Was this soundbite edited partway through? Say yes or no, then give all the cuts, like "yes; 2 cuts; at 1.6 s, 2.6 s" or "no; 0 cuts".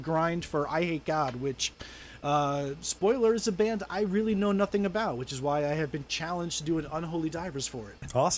no; 0 cuts